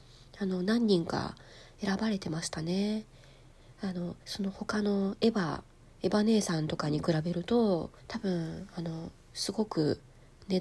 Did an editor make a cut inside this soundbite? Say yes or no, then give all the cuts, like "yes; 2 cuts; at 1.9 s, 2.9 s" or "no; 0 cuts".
yes; 2 cuts; at 4.2 s, 8.0 s